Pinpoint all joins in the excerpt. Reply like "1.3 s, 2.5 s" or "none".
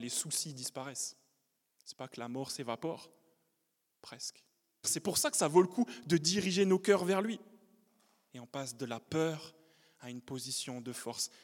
4.8 s, 8.3 s

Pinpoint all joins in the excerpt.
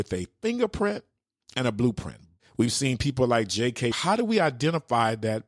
2.4 s, 3.9 s

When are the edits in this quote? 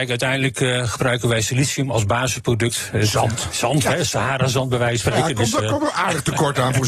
3.8 s

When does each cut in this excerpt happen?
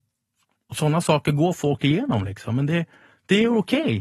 none

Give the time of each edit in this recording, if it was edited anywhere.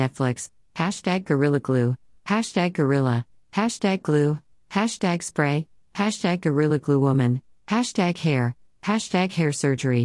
none

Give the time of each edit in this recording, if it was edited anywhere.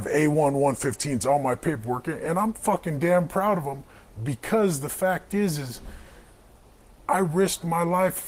none

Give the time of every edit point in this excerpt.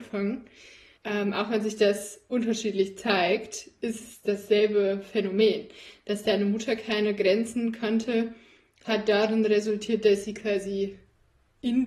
1.0 s

